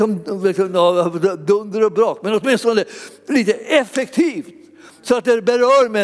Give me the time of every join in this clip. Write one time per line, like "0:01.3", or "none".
none

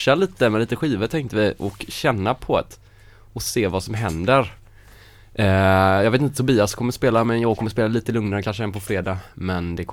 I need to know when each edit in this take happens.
none

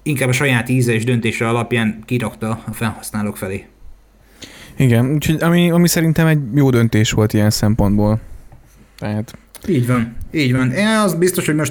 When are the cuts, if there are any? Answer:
none

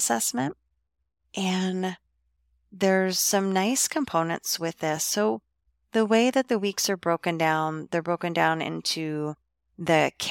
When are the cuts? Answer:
none

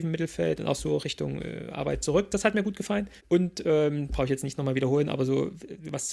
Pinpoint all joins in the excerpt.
0:03.2

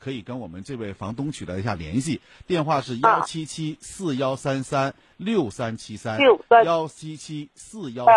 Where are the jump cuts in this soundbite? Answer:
none

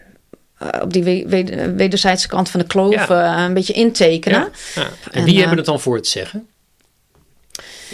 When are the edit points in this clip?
0:05.0

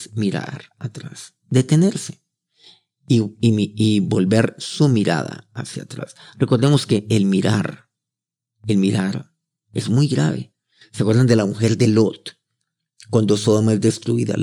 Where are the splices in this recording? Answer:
none

